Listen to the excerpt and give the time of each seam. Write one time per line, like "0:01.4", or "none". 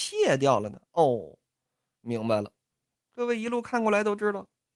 0:02.9